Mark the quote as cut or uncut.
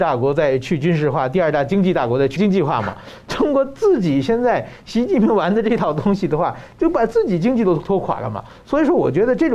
cut